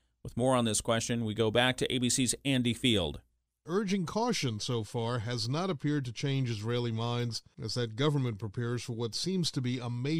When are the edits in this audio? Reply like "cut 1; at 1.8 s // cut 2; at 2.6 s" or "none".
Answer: cut 1; at 3.7 s